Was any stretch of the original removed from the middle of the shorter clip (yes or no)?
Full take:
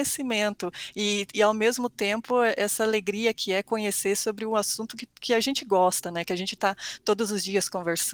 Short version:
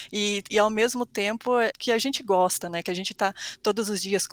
yes